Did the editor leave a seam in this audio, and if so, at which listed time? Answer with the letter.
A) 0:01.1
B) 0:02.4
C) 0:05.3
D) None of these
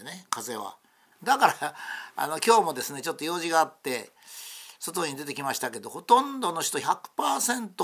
A